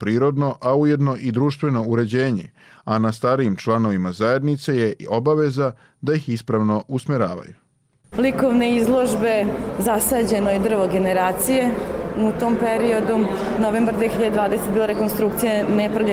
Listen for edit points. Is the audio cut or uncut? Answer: cut